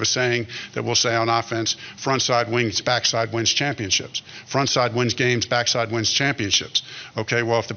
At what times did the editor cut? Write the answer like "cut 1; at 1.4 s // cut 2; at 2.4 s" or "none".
cut 1; at 2.8 s